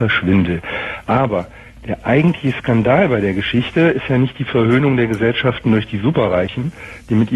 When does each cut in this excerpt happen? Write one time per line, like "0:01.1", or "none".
none